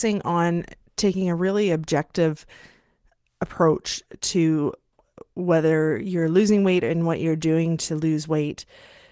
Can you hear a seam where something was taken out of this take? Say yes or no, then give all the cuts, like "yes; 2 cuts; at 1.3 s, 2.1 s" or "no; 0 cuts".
no; 0 cuts